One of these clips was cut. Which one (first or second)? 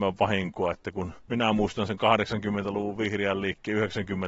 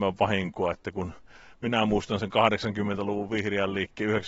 first